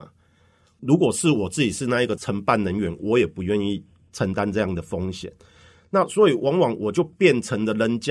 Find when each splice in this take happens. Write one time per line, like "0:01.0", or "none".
none